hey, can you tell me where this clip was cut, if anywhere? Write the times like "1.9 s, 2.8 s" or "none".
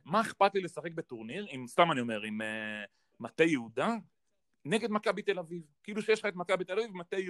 none